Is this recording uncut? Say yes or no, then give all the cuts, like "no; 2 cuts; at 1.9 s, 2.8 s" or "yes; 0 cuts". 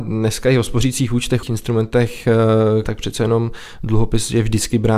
no; 2 cuts; at 1.4 s, 2.8 s